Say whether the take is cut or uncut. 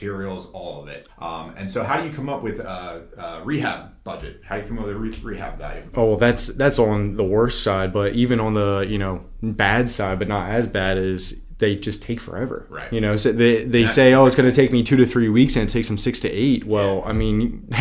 cut